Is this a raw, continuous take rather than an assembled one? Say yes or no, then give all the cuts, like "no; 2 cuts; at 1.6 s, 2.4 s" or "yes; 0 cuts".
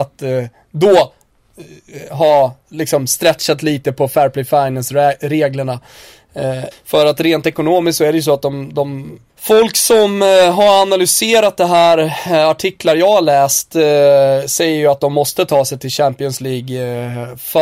no; 2 cuts; at 6.7 s, 9.3 s